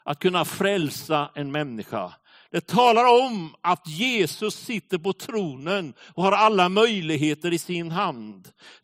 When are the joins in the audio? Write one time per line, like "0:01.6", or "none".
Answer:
none

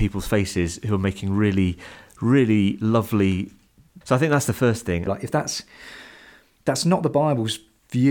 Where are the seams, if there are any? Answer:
0:04.0
0:05.1

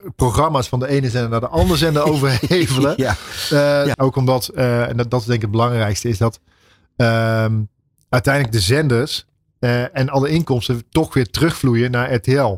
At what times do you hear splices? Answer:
0:03.9

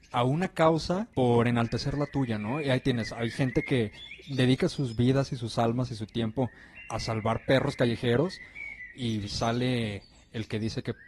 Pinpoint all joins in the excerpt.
0:01.1

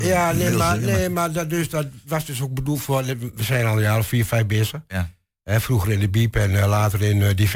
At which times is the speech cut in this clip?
none

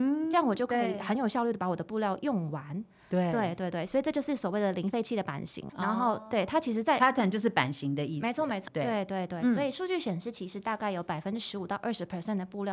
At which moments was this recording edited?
0:05.7
0:08.7

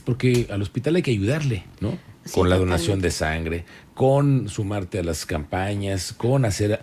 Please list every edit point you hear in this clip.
none

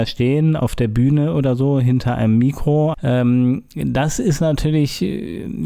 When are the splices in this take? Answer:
0:02.9

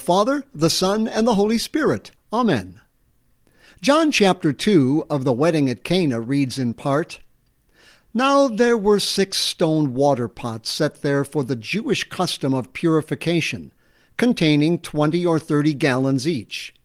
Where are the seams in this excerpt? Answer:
none

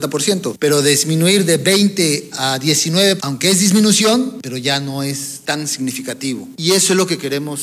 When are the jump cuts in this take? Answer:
0:03.2

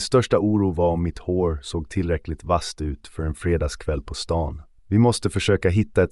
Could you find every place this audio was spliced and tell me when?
0:04.8

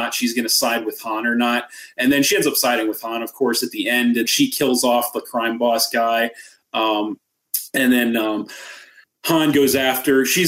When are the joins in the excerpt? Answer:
0:04.2

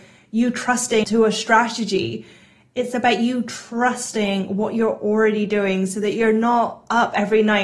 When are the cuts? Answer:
0:01.0

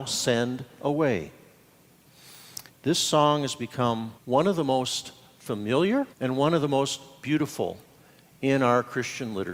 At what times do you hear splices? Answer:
0:02.7
0:04.2
0:06.1

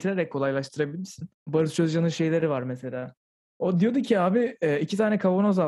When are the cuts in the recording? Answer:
0:01.4

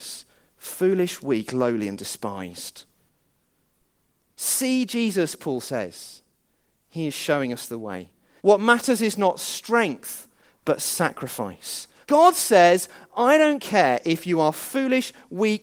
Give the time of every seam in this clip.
0:08.4
0:12.0

